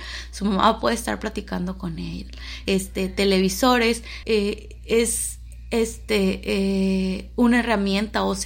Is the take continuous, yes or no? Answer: no